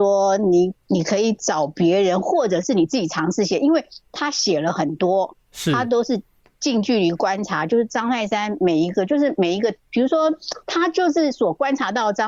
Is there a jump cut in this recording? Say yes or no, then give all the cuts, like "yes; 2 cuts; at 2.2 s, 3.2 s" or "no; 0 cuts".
no; 0 cuts